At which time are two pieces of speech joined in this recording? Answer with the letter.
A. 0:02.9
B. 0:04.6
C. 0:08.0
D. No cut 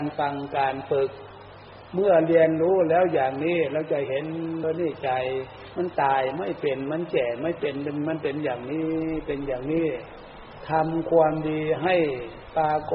B